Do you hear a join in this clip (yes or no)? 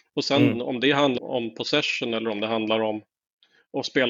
yes